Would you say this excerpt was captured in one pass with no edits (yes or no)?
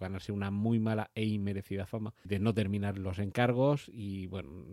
no